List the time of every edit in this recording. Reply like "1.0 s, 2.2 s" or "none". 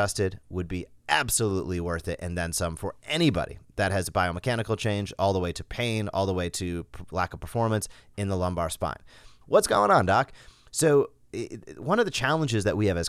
9.4 s